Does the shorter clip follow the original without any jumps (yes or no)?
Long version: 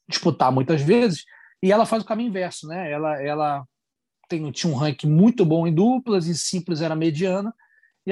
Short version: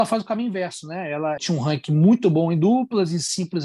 no